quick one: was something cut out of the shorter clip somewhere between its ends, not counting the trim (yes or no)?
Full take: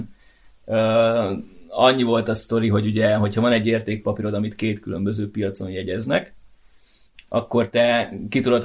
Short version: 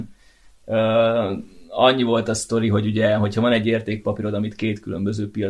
no